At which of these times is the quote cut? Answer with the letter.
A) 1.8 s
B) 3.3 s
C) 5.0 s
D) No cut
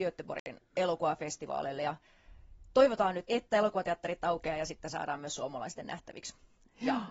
B